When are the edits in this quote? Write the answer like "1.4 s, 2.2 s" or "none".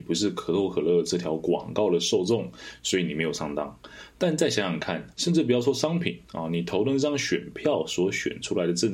5.1 s